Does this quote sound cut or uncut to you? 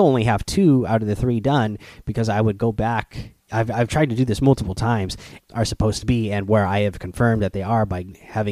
cut